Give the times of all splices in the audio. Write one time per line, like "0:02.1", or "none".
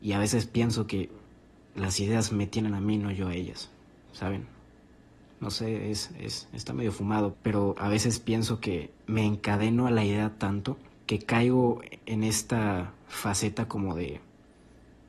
0:07.3
0:09.0
0:11.0